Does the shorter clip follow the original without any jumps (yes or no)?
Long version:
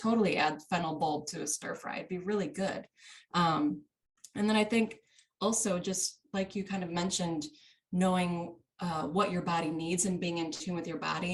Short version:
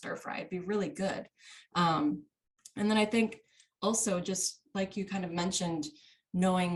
yes